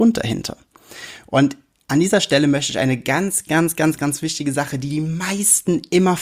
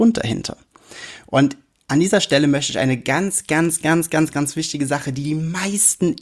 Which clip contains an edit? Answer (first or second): first